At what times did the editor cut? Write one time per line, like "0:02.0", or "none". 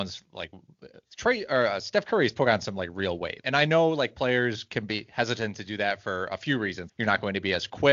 0:03.4
0:06.9